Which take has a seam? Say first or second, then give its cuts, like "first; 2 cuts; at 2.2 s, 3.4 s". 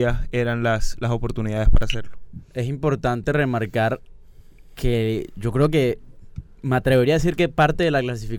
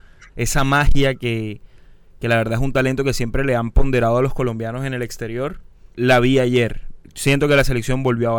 second; 1 cut; at 5.9 s